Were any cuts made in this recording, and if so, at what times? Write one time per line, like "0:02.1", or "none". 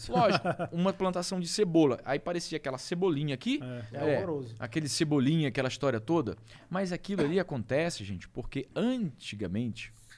0:03.9